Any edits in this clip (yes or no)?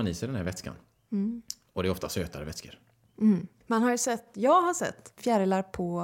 yes